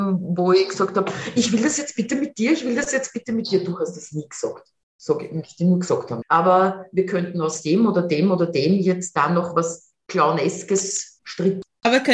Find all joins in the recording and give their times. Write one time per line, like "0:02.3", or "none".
0:06.2